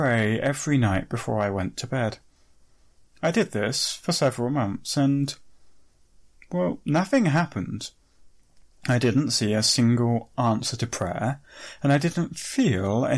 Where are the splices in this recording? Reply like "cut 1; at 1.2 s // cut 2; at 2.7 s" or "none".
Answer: none